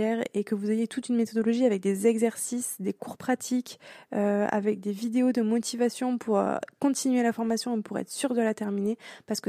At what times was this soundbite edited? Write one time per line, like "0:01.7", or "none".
none